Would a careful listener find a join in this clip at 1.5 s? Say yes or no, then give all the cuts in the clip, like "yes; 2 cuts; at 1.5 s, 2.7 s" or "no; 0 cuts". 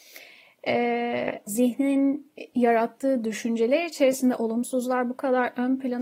yes; 1 cut; at 1.5 s